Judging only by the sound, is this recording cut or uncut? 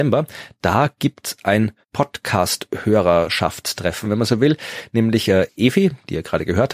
cut